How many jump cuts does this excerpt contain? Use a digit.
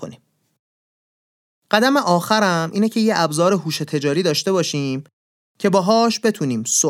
0